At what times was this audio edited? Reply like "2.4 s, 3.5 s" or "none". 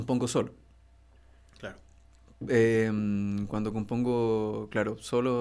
none